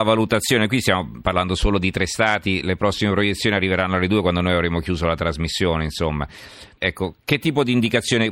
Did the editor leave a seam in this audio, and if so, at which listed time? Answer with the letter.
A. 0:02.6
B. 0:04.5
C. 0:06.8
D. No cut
C